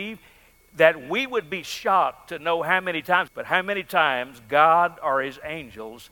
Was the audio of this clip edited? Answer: yes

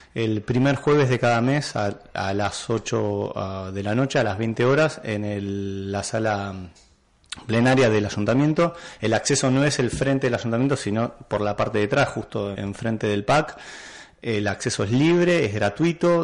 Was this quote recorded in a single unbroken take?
no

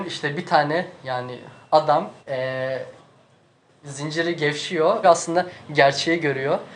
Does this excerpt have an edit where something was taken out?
yes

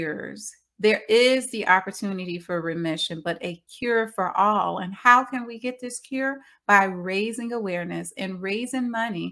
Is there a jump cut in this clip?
yes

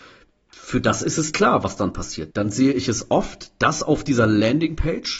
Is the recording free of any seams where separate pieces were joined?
no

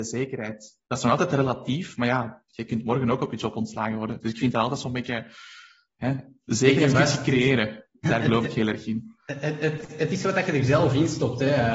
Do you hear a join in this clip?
no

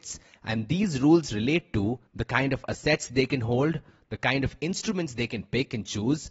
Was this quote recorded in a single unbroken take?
yes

